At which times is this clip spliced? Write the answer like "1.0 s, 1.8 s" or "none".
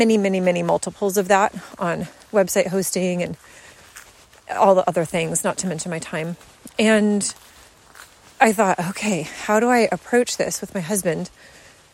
none